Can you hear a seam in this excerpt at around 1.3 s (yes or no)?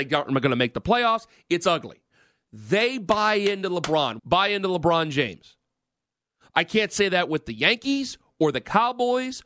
no